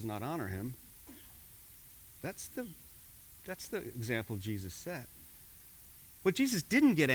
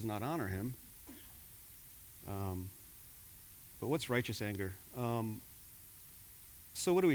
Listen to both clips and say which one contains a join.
second; 2 cuts; at 2.2 s, 4.9 s

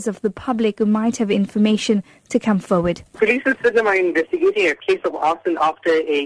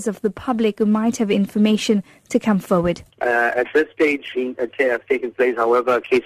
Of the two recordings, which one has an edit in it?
second; 2 cuts; at 3.1 s, 4.3 s

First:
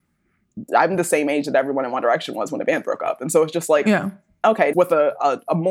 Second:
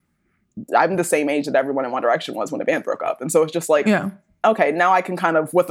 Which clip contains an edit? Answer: first; 1 cut; at 4.7 s

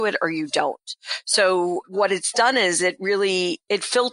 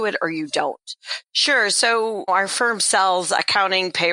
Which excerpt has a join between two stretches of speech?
second; 2 cuts; at 1.2 s, 2.3 s

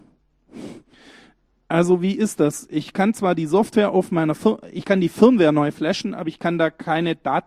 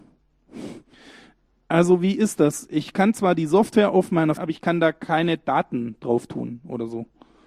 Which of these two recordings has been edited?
second; 1 cut; at 4.4 s

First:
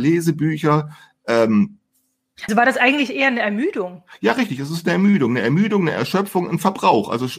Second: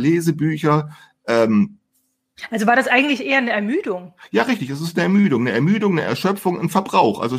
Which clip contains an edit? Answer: first; 1 cut; at 2.5 s

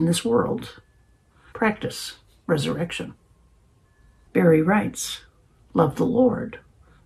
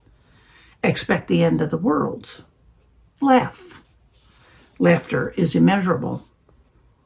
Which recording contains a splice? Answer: first; 2 cuts; at 1.5 s, 4.3 s

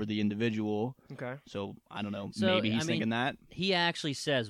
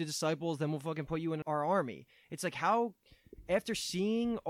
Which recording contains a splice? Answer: second; 1 cut; at 1.4 s

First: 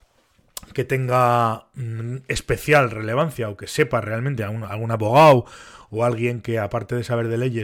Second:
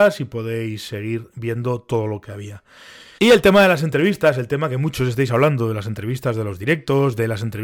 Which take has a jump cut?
second; 1 cut; at 3.2 s

